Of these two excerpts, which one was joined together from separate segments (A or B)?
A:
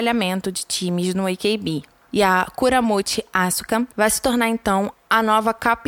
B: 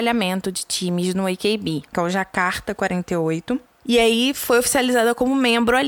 B